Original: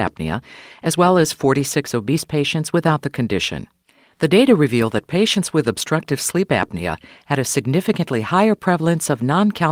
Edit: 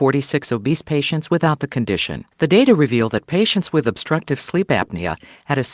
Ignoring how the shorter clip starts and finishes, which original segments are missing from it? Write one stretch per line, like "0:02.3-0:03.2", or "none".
0:03.7-0:04.1